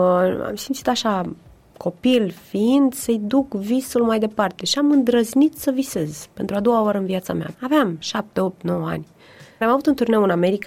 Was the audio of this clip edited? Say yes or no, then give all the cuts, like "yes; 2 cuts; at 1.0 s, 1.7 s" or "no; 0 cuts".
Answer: yes; 2 cuts; at 7.5 s, 9.6 s